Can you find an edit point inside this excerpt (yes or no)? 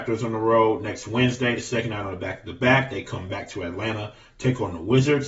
no